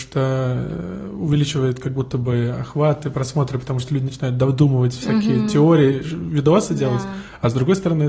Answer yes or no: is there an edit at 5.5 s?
no